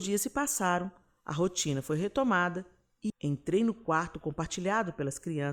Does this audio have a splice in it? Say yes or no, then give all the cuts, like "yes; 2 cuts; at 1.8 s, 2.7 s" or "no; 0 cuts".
yes; 1 cut; at 3.1 s